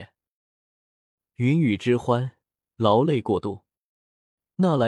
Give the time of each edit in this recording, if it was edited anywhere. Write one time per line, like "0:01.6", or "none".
none